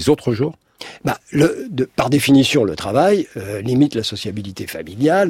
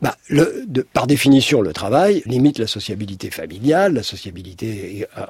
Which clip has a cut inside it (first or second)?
second